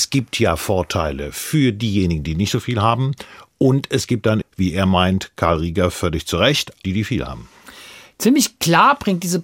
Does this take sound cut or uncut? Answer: cut